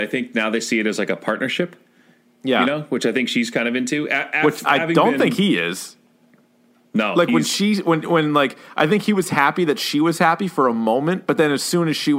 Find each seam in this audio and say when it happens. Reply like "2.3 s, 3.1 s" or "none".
none